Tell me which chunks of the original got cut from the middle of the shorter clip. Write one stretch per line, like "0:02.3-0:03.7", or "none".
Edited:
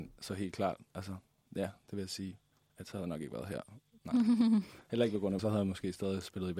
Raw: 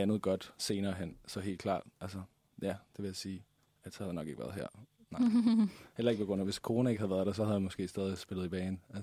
0:06.4-0:07.3